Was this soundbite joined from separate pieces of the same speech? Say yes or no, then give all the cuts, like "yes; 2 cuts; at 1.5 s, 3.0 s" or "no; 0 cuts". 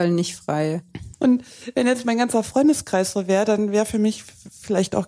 yes; 1 cut; at 1.1 s